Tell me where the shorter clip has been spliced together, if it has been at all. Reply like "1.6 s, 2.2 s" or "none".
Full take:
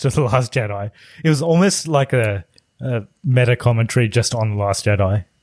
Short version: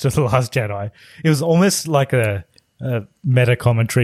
none